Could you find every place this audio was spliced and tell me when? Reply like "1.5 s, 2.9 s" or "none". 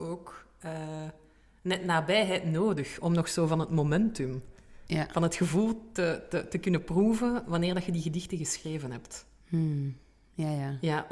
none